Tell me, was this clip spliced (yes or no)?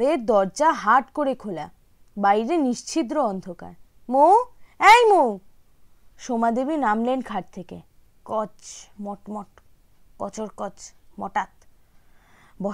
yes